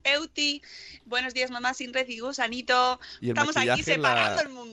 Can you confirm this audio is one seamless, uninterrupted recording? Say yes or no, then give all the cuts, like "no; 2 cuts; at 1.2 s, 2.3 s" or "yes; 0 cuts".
no; 1 cut; at 3.2 s